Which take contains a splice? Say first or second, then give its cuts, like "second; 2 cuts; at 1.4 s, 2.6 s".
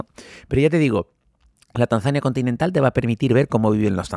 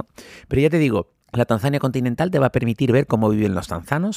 second; 1 cut; at 1.2 s